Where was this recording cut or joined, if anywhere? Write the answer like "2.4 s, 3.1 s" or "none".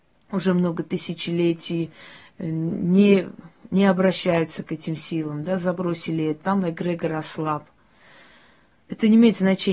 6.4 s